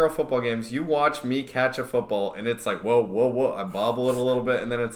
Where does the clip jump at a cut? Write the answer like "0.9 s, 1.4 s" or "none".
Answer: none